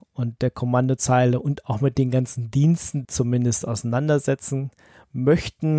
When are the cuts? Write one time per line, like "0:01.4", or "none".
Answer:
0:03.0